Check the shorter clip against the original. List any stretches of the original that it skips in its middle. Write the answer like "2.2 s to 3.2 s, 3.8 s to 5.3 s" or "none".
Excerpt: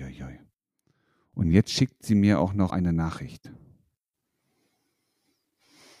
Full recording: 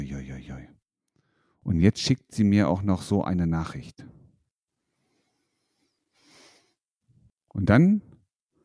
3.0 s to 3.2 s